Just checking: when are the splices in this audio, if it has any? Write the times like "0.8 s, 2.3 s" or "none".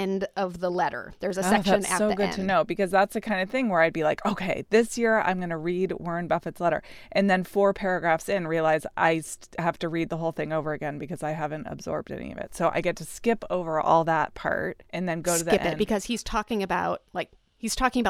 none